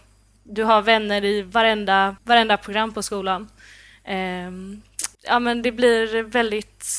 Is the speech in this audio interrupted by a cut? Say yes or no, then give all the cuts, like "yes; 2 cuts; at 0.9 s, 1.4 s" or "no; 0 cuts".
yes; 2 cuts; at 2.2 s, 5.1 s